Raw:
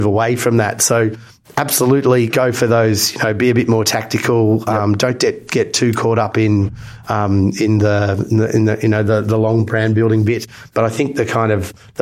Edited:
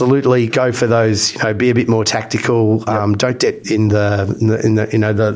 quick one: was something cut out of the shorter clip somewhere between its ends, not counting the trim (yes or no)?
yes